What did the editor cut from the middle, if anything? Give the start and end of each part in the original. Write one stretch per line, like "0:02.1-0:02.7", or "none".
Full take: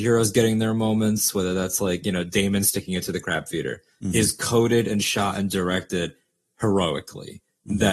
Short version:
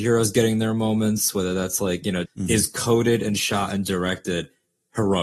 0:02.2-0:03.9